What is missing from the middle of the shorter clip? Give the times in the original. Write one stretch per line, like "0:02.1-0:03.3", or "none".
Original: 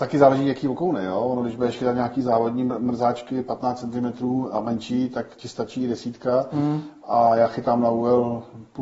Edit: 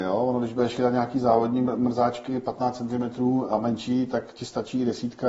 none